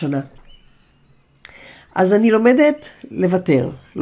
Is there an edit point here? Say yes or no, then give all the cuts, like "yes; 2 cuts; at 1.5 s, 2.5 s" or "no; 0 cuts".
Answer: no; 0 cuts